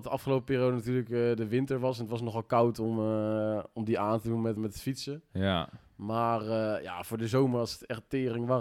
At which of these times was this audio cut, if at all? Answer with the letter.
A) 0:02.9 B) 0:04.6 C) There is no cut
B